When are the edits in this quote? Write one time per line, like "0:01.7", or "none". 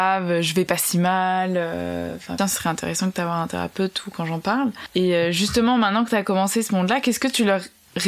0:02.4